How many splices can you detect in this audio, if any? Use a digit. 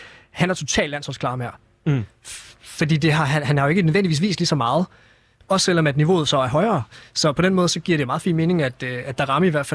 0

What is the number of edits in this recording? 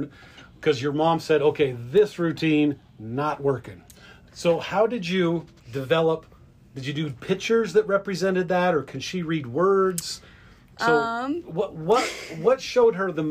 2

